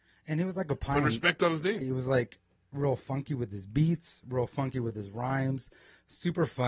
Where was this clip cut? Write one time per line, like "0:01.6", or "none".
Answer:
0:01.8